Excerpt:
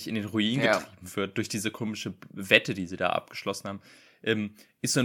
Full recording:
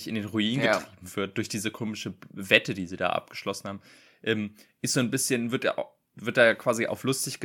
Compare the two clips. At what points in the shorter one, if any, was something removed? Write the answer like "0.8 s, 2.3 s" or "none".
none